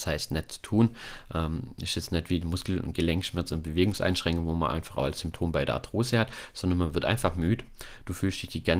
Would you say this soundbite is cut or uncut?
uncut